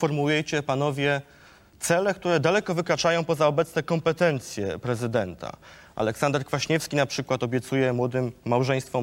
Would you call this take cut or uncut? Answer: uncut